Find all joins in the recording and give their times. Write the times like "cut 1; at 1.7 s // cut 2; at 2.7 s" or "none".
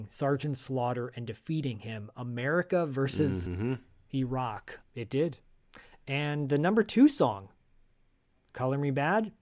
cut 1; at 3.5 s // cut 2; at 4.8 s